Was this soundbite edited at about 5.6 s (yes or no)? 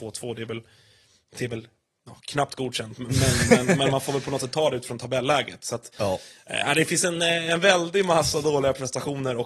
no